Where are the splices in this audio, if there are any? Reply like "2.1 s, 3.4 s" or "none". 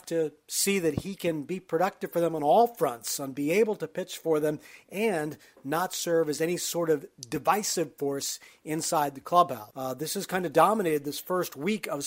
9.7 s